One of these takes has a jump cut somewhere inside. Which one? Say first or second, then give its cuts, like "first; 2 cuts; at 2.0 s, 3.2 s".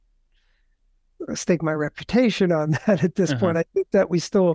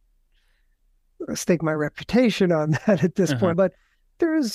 second; 1 cut; at 3.5 s